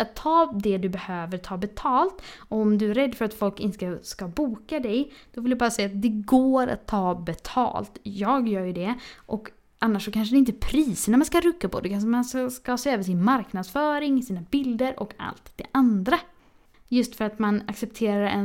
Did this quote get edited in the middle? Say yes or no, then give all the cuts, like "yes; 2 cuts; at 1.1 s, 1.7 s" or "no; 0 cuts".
yes; 1 cut; at 16.7 s